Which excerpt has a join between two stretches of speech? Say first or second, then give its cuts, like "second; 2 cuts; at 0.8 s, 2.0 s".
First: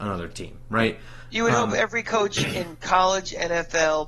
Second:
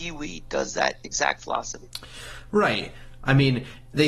second; 1 cut; at 3.2 s